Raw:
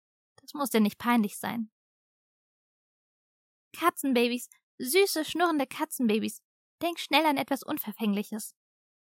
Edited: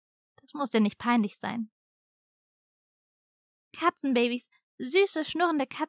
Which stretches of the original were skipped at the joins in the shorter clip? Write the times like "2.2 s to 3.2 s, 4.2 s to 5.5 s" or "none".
none